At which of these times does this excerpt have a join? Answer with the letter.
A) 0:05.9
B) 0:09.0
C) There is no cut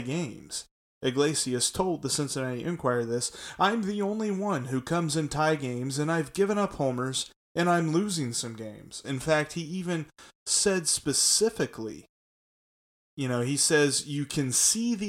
B